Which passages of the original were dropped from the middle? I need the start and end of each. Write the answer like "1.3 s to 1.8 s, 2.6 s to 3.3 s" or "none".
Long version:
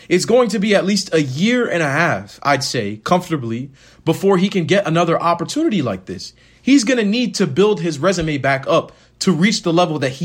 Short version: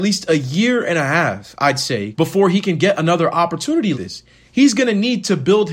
3.0 s to 4.0 s, 5.8 s to 6.0 s